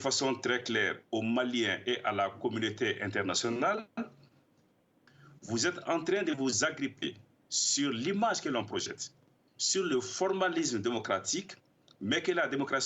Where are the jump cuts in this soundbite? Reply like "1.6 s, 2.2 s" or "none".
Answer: none

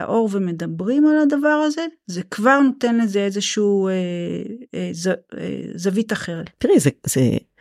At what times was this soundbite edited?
none

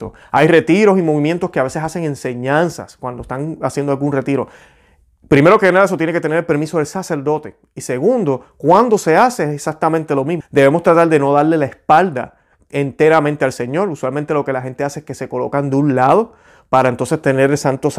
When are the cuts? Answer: 10.4 s

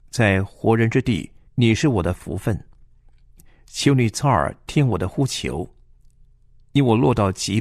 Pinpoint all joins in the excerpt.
1.5 s

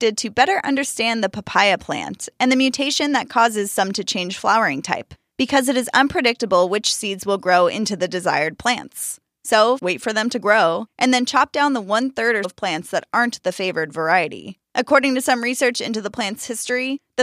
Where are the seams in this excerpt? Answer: 9.8 s, 12.4 s, 14.6 s

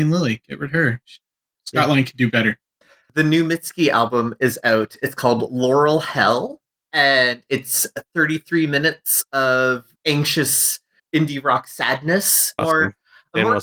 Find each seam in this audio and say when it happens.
2.8 s, 12.6 s

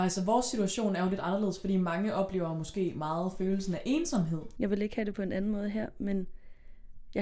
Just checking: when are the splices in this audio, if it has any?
4.6 s

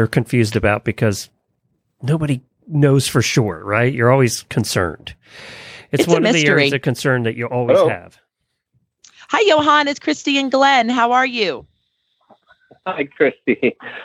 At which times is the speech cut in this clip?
none

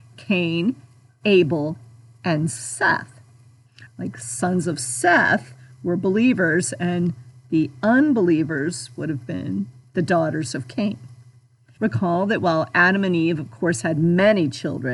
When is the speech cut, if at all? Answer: 3.9 s, 11.8 s

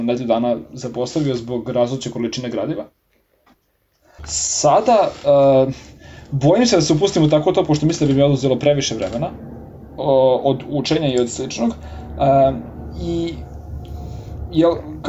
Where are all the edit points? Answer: 4.2 s

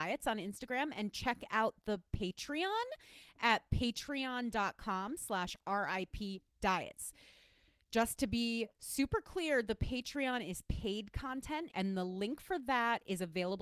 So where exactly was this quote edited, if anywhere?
11.7 s

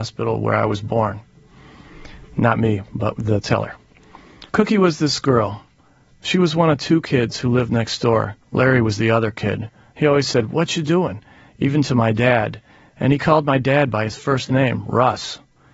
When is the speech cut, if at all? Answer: 4.5 s, 8.4 s

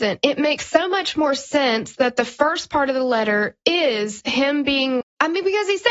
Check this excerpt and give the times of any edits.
5.0 s

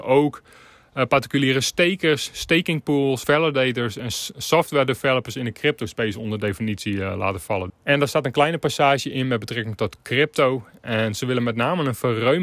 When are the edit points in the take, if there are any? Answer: 3.2 s, 7.7 s

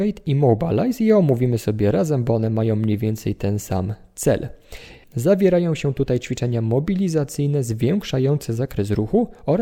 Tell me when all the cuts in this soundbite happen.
5.0 s

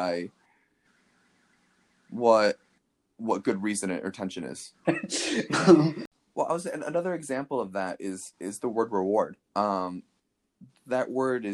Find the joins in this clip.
4.8 s, 9.5 s

